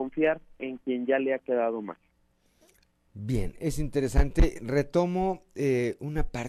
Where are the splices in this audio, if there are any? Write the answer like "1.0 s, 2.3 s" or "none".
none